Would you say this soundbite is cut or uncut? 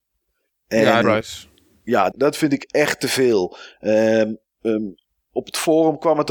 cut